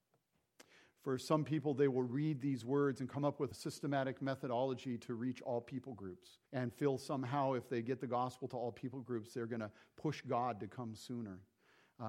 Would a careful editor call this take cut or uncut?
cut